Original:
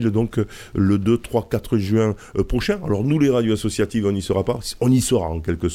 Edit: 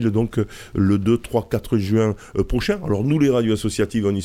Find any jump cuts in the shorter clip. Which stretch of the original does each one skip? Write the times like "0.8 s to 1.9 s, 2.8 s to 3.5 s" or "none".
none